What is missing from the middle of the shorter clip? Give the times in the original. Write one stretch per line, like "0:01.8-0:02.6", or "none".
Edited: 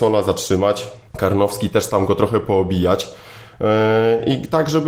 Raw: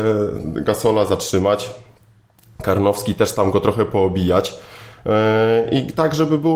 0:01.9-0:02.5